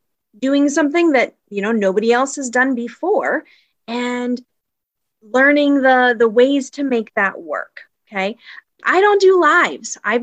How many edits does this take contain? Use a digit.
1